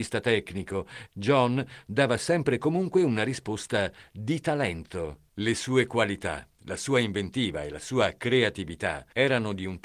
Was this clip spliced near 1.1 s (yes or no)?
yes